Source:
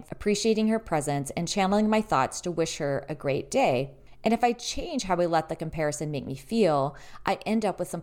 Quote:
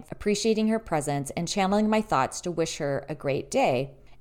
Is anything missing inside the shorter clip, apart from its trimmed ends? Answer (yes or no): no